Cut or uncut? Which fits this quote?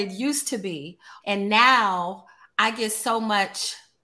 cut